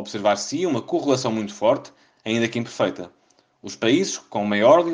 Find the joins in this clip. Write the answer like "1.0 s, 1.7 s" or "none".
none